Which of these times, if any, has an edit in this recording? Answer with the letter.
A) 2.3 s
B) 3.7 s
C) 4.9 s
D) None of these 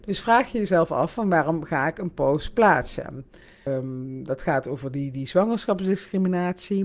B